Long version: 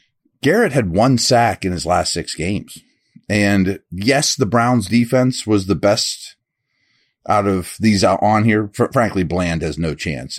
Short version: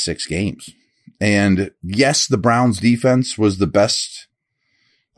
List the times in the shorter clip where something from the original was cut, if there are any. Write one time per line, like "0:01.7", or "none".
none